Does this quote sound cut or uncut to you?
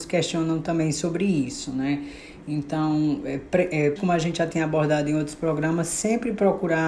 cut